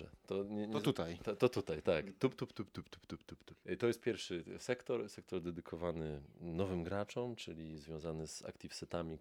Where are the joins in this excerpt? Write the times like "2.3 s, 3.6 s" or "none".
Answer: 2.5 s